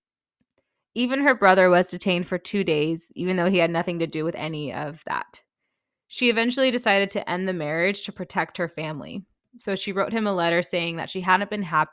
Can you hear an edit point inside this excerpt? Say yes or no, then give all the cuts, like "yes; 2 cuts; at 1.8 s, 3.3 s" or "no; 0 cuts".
no; 0 cuts